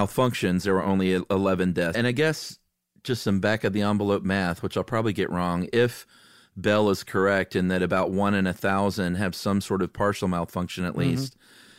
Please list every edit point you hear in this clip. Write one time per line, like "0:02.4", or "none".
0:01.9